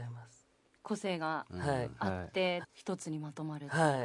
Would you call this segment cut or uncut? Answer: cut